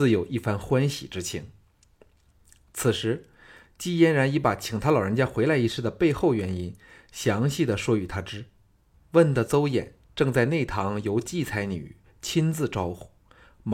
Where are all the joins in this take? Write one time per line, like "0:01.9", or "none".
0:08.9